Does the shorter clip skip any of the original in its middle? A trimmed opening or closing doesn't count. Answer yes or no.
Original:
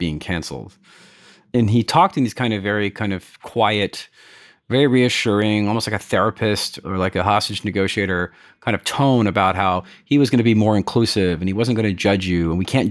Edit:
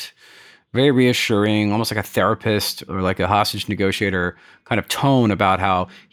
no